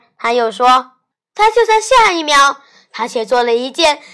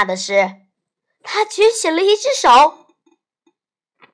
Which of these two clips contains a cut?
first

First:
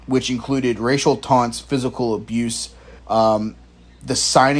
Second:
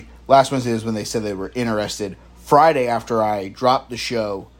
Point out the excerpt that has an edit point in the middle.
first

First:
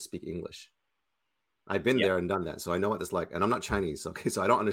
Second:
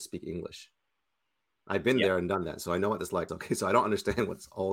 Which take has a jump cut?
second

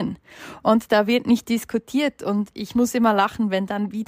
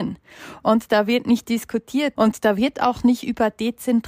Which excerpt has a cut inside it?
second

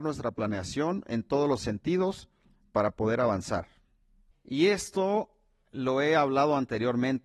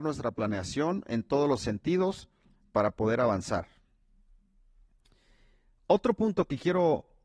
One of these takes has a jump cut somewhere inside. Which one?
first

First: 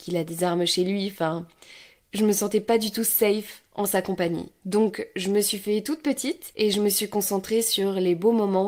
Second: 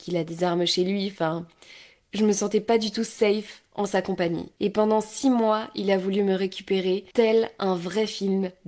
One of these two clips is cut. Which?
second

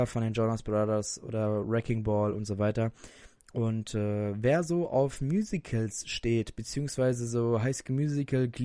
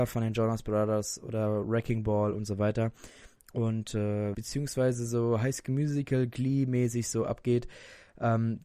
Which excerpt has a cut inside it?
second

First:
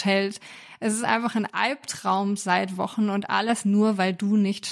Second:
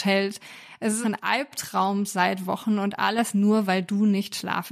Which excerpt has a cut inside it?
second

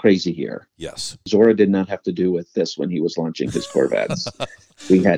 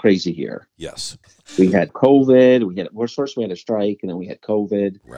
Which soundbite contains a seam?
second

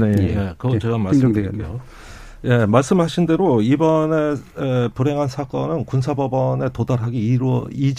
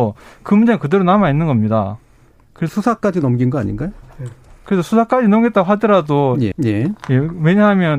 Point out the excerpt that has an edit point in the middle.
second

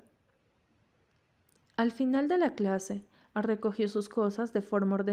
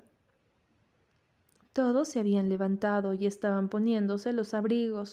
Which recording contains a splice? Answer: second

